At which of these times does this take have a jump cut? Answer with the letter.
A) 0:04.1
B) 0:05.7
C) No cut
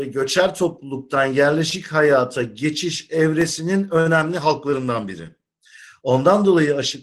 C